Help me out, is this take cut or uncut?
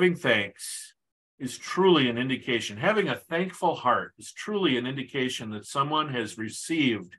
uncut